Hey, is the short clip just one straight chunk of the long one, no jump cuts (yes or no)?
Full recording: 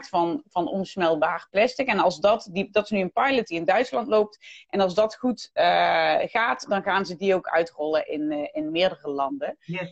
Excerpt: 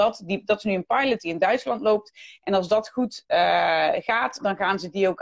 yes